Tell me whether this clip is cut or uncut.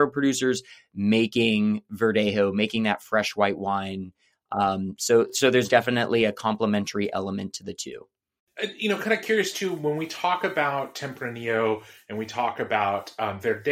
uncut